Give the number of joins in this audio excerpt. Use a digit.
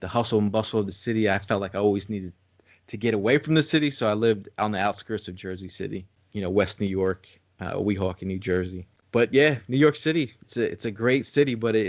0